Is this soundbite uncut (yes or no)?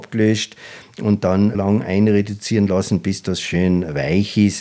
no